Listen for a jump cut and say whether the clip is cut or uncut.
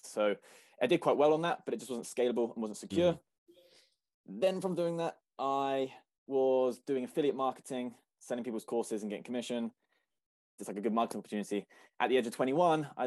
cut